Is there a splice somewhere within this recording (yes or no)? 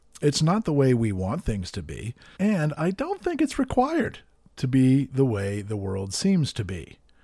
yes